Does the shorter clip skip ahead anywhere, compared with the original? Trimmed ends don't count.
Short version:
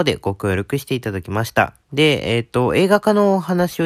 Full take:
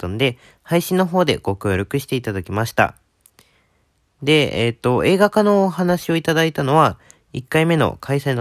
yes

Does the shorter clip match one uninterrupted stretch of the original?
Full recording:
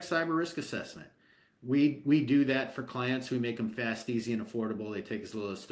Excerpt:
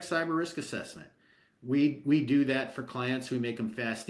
yes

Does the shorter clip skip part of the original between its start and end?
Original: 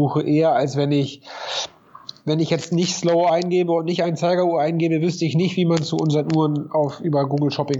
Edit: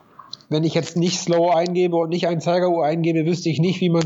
no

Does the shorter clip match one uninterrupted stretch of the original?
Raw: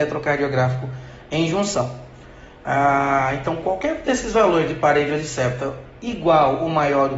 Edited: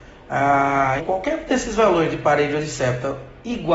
no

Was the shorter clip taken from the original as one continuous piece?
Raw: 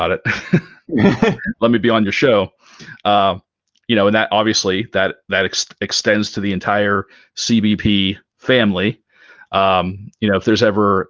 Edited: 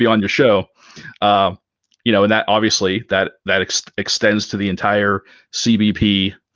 yes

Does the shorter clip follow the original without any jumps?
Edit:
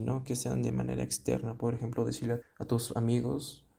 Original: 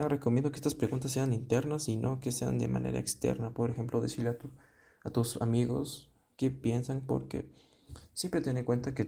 no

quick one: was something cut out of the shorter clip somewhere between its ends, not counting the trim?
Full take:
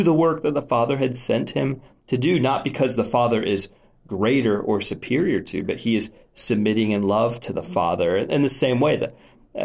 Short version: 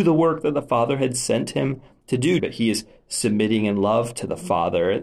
yes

